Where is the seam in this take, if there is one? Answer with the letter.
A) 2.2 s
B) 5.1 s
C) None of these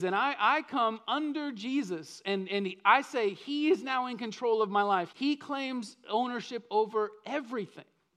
B